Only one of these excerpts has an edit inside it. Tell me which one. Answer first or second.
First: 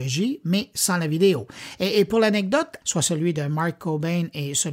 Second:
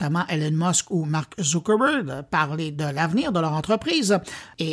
first